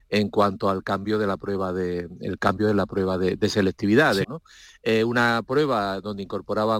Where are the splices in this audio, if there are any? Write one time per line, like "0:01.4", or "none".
0:04.2